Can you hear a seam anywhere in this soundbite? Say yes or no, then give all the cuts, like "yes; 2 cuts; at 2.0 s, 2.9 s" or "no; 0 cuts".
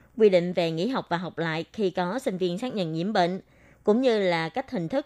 no; 0 cuts